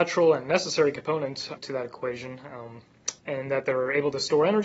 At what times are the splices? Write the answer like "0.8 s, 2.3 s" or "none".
1.6 s, 3.2 s